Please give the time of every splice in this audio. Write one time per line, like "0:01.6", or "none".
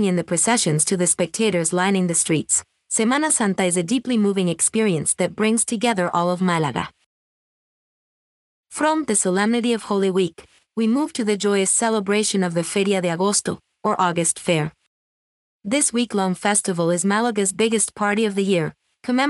none